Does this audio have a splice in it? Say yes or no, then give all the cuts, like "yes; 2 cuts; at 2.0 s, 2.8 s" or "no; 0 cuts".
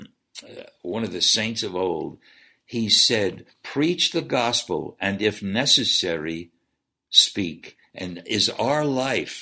no; 0 cuts